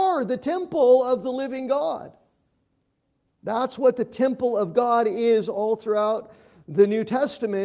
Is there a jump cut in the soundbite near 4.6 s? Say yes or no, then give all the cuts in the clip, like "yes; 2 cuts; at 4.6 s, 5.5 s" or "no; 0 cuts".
no; 1 cut; at 3.3 s